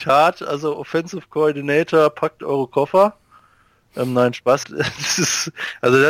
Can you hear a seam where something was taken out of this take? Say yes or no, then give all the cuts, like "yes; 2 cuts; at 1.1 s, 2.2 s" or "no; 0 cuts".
yes; 1 cut; at 4.6 s